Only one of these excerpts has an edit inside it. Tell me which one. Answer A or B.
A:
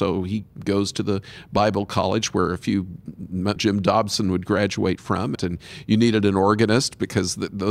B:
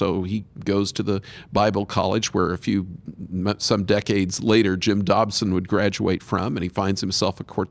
A